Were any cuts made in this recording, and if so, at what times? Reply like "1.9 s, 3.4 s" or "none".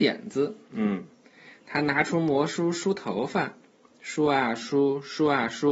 none